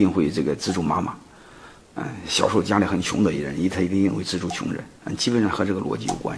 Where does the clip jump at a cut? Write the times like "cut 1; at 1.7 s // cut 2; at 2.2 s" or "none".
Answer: none